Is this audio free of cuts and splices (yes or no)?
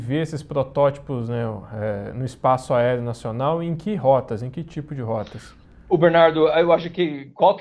yes